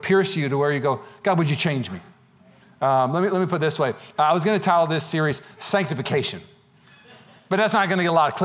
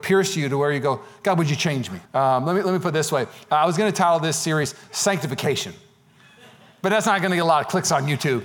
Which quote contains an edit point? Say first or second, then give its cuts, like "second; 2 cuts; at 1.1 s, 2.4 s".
second; 1 cut; at 2.1 s